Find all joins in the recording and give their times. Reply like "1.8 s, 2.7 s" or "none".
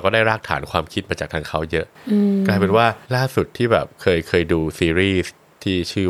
3.0 s